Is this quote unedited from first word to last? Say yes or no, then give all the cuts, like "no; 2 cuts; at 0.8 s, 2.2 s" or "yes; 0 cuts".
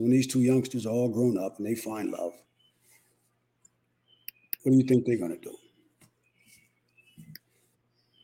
yes; 0 cuts